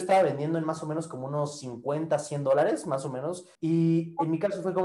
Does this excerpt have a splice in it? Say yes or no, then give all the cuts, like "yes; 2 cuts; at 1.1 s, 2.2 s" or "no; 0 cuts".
yes; 1 cut; at 3.5 s